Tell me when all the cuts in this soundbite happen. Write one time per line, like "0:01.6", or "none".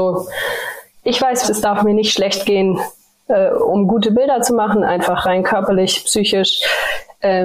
0:01.4